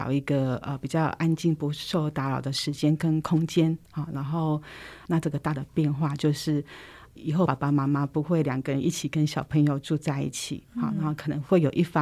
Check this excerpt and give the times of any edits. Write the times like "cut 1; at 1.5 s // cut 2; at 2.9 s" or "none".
cut 1; at 5.0 s // cut 2; at 7.5 s